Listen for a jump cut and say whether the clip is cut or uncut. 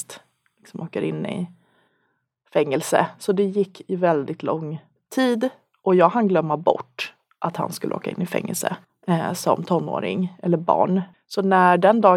uncut